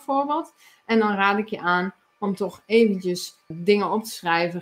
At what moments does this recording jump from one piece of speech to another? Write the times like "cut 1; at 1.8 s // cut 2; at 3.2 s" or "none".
cut 1; at 3.5 s